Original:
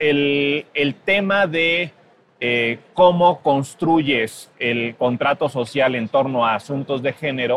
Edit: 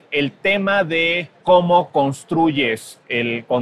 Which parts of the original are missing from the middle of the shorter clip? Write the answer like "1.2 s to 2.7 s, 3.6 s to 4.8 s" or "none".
2.0 s to 2.9 s